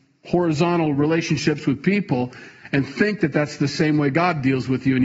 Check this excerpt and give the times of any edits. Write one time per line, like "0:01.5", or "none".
none